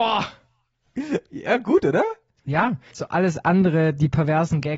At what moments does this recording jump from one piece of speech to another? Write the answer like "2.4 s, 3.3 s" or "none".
2.9 s